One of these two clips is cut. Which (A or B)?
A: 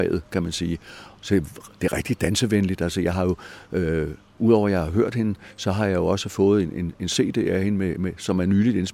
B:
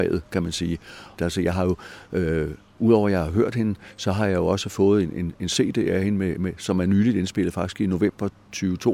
B